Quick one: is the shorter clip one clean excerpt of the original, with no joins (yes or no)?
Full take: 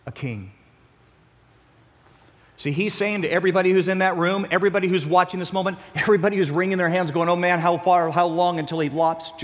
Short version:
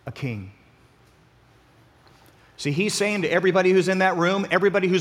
yes